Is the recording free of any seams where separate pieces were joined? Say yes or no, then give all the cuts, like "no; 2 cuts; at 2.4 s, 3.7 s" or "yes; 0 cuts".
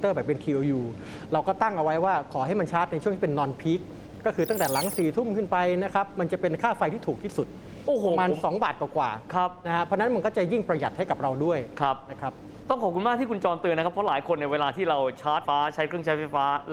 no; 1 cut; at 15.5 s